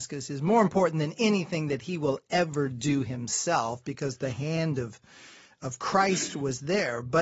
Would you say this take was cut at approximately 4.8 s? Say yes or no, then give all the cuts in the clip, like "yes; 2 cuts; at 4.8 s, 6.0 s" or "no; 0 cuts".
no; 0 cuts